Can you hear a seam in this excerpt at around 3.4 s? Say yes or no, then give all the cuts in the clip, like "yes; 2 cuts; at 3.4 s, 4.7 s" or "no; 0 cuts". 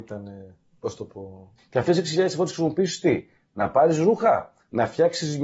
no; 1 cut; at 1.6 s